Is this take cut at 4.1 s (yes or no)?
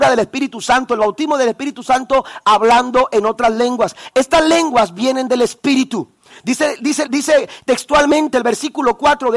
no